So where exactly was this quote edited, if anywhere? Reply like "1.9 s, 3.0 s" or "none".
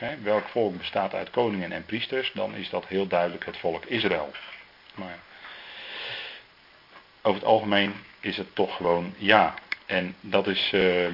4.9 s